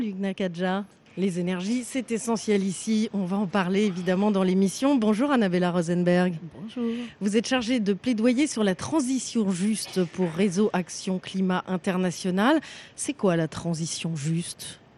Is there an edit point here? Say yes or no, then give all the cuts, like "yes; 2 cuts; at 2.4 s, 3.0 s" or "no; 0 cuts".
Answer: yes; 1 cut; at 1.1 s